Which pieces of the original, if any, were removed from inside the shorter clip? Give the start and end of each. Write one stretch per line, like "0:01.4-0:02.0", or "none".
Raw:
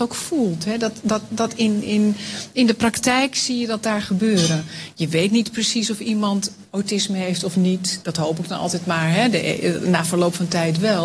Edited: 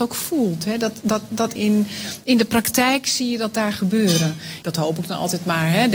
0:01.6-0:01.8
0:04.9-0:08.0